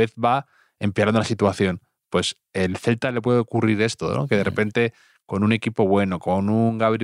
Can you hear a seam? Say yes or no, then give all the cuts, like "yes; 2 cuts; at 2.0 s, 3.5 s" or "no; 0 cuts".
no; 0 cuts